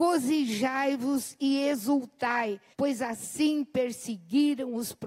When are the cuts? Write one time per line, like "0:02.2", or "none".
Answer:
0:02.7